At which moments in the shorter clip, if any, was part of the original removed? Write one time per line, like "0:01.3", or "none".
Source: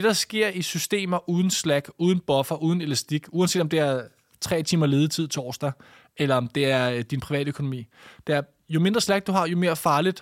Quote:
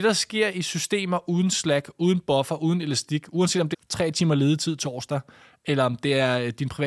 0:03.7